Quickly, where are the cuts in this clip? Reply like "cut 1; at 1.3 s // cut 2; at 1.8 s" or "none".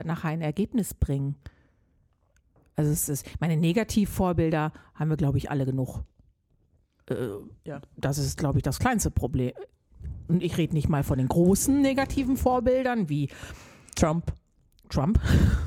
none